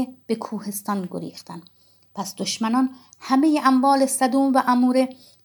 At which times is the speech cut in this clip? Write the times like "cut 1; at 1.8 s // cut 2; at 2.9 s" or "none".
none